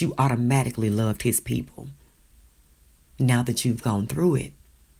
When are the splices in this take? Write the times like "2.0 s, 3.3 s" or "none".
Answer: 3.0 s